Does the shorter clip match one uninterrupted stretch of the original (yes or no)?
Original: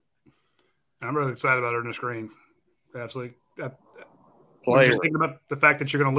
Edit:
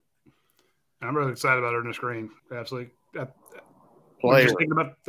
no